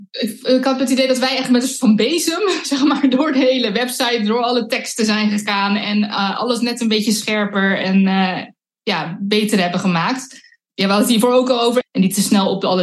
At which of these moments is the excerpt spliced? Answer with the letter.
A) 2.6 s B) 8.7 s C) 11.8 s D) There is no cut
C